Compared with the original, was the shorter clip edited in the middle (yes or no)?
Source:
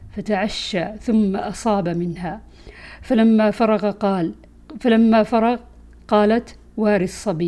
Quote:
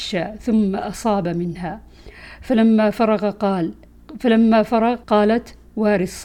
yes